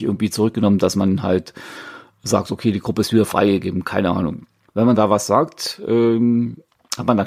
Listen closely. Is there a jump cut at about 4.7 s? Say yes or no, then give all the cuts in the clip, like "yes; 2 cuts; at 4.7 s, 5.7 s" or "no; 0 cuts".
yes; 1 cut; at 4.7 s